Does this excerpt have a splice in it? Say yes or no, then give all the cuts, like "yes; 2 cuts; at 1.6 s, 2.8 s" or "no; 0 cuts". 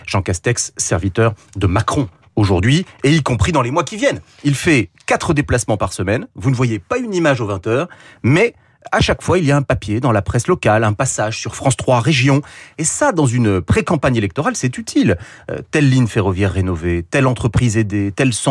no; 0 cuts